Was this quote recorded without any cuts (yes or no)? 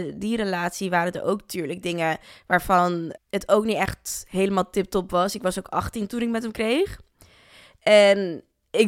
no